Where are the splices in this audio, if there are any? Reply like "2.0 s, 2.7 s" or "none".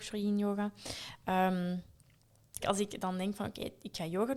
2.6 s